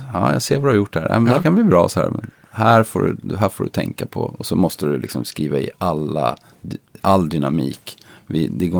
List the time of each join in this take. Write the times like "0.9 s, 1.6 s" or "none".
7.0 s